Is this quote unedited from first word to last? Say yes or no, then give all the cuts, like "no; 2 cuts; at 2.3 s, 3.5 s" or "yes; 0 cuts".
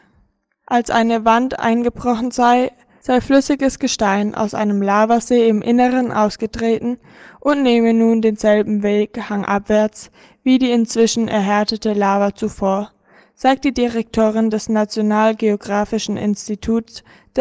yes; 0 cuts